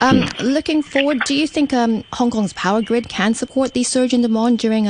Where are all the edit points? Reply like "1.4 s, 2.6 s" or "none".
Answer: 2.1 s